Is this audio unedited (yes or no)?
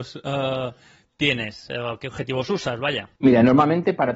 no